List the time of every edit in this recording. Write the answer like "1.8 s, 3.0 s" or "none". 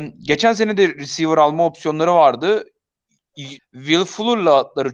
3.6 s